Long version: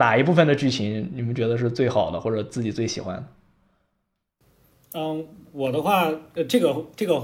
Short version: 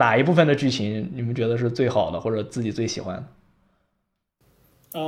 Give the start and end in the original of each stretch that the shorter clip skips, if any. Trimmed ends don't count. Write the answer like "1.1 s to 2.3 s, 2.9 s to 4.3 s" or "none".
none